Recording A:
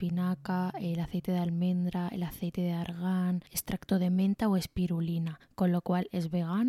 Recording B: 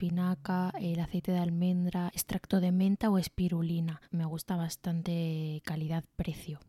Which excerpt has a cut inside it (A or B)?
B